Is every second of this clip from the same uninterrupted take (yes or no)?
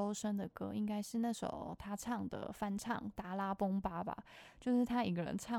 yes